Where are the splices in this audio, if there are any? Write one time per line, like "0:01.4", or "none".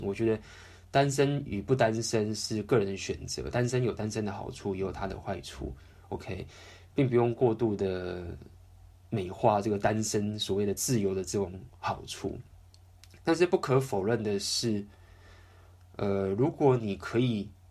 none

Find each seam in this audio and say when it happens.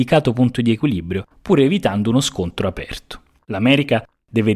0:01.3
0:03.4

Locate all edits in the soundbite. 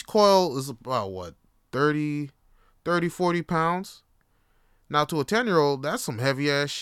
none

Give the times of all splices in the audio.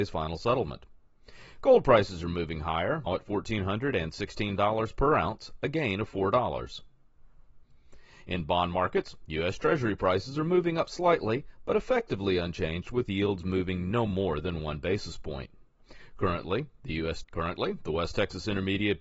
0:03.1
0:17.2

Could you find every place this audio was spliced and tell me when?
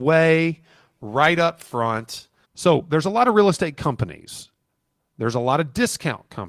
0:02.4

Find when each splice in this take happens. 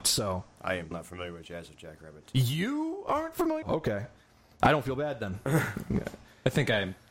0:00.9
0:03.6

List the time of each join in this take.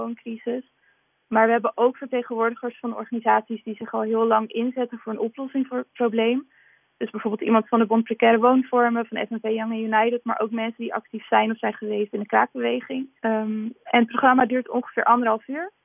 0:13.2

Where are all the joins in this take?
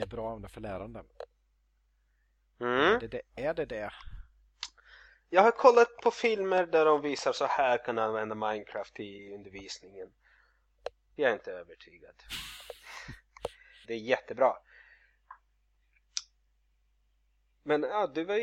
0:11.2
0:13.8

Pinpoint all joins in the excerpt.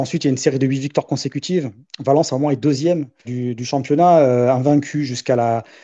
0:03.2

